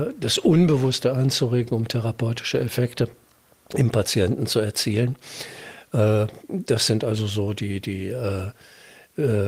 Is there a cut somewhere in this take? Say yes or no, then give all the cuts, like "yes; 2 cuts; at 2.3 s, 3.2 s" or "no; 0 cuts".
no; 0 cuts